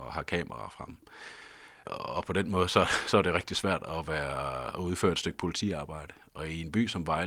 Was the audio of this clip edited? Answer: no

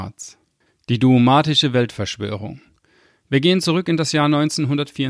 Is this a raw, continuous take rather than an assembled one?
yes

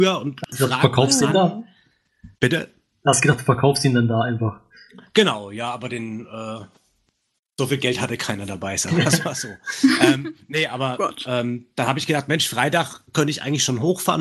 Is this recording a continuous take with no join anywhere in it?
no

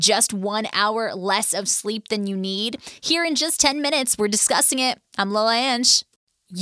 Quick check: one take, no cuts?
yes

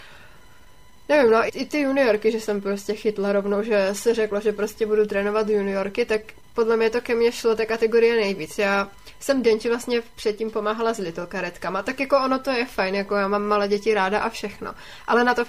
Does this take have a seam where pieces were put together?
yes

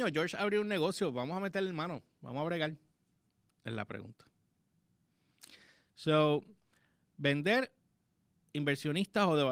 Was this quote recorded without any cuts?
no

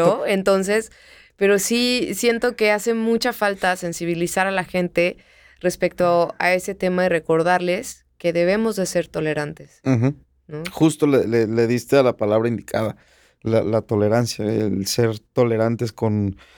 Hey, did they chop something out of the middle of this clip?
no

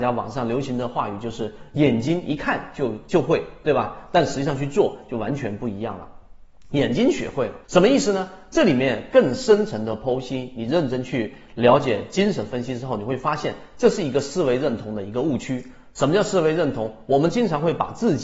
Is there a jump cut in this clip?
yes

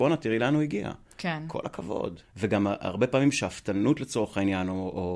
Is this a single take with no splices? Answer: no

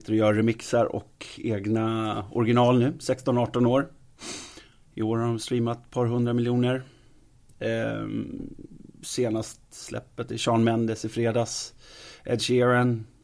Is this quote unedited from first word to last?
yes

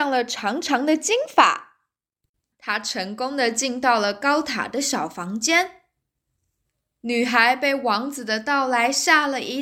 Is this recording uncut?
no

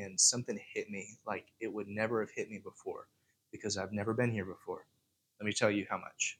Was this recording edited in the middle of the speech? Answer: yes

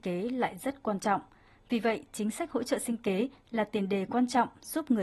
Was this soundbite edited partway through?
no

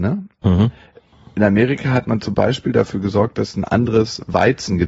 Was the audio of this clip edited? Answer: no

